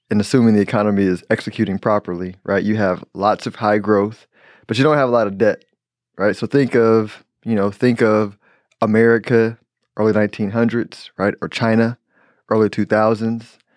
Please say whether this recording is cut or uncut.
uncut